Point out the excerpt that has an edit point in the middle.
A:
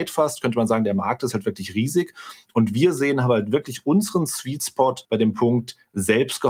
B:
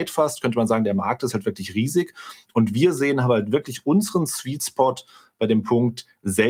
A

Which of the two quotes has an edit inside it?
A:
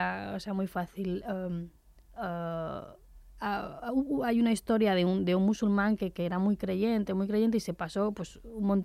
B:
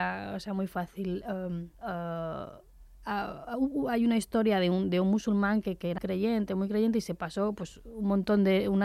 B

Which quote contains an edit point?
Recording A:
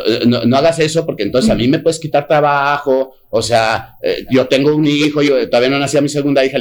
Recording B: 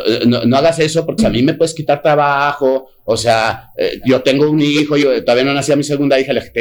B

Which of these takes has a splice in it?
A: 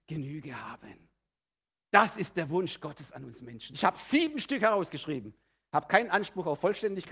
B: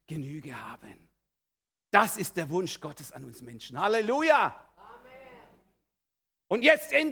A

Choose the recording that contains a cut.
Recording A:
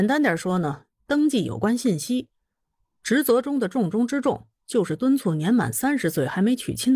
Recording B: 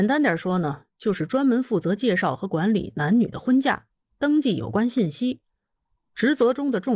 A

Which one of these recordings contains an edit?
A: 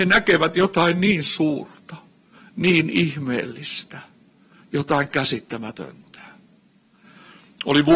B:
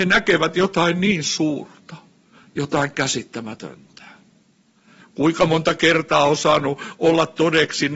B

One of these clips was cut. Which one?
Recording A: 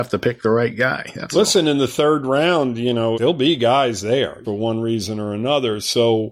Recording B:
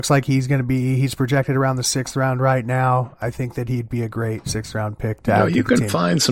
A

